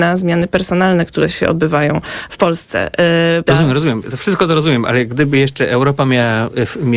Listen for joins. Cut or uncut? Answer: cut